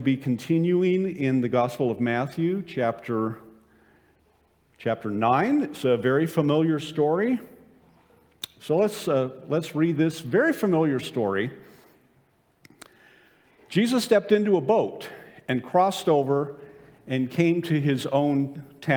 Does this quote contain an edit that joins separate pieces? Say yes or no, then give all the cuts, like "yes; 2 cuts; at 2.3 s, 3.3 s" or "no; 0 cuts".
yes; 1 cut; at 8.6 s